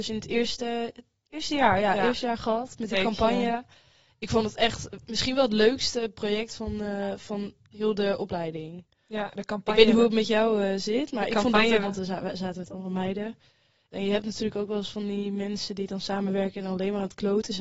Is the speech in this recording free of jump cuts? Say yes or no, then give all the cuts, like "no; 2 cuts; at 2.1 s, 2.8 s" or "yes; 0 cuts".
no; 2 cuts; at 11.8 s, 13.9 s